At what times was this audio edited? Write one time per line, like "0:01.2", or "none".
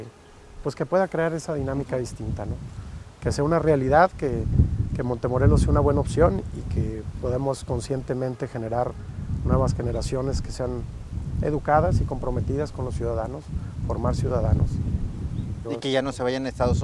0:15.6